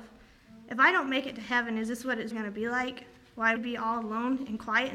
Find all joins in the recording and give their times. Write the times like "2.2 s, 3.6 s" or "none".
2.3 s, 3.6 s